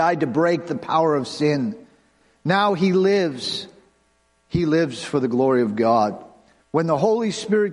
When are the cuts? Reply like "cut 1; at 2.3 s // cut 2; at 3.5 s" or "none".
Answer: cut 1; at 6.6 s